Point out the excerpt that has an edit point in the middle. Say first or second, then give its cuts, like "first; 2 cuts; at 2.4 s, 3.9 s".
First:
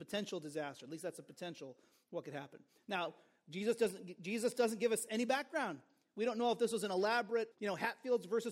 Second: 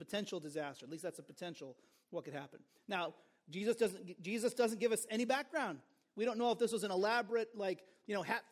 first; 1 cut; at 7.5 s